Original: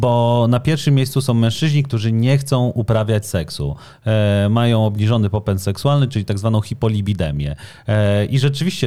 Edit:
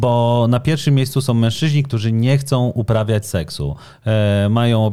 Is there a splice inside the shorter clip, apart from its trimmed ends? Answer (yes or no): no